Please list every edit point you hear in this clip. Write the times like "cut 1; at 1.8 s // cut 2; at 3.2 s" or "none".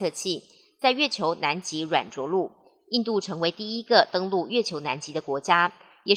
none